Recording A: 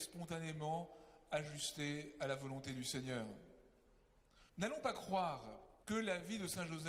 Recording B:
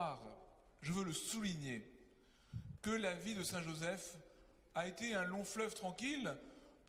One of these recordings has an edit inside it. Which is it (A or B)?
A